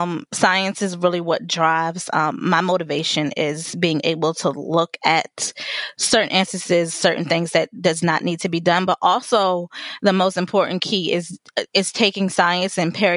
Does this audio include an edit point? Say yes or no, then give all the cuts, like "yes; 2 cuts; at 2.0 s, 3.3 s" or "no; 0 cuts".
no; 0 cuts